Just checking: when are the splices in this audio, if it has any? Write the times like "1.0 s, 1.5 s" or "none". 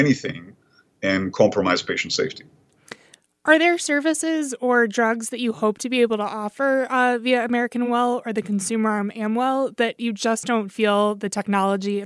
none